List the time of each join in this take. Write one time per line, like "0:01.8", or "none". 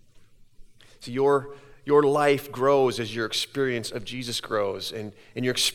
none